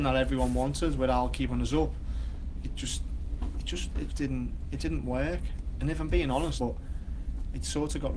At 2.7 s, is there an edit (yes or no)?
no